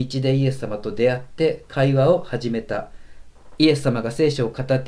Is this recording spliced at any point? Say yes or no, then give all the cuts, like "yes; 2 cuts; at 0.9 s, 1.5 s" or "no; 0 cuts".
no; 0 cuts